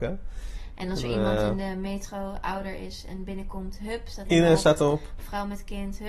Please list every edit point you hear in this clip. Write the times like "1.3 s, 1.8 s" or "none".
4.2 s